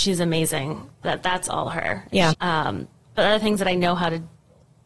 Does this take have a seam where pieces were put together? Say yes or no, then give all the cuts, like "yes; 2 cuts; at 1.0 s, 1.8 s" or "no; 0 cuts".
yes; 2 cuts; at 1.0 s, 2.3 s